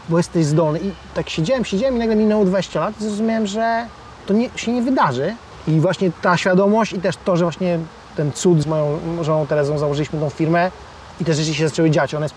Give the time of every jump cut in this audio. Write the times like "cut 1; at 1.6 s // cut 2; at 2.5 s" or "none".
cut 1; at 8.6 s